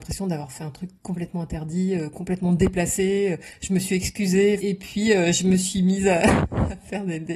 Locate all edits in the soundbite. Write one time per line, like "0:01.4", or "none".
0:04.6

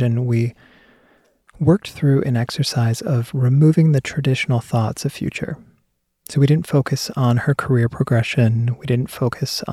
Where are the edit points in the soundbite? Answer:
none

